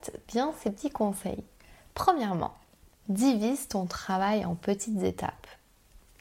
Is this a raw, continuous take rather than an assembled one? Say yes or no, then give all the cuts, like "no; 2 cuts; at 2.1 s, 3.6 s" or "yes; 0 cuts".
yes; 0 cuts